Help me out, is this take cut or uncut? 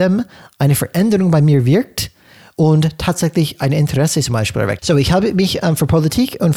cut